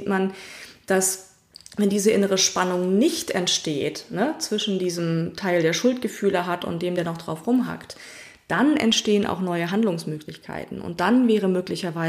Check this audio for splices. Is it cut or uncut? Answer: uncut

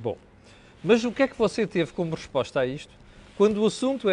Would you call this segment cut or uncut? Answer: uncut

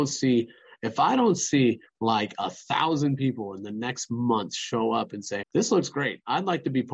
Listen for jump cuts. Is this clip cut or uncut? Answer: cut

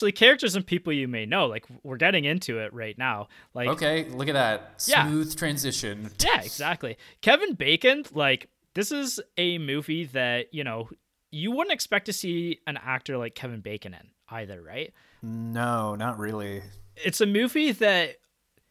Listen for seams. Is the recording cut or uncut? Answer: uncut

